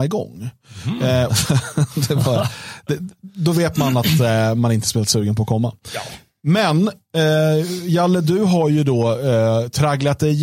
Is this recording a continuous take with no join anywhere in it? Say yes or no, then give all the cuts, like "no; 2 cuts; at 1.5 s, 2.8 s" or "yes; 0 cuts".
no; 1 cut; at 1.3 s